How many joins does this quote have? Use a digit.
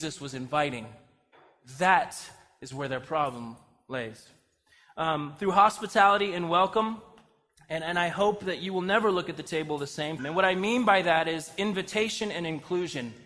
1